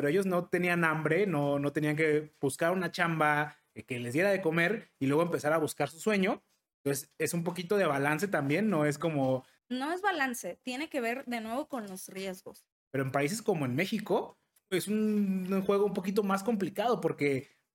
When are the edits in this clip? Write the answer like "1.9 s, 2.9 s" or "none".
12.9 s, 14.6 s